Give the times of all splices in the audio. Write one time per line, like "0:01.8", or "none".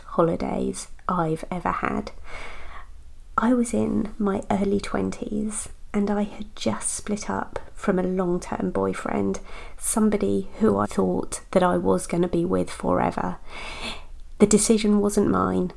0:10.8